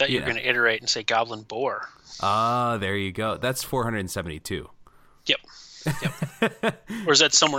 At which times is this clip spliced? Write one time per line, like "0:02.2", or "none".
none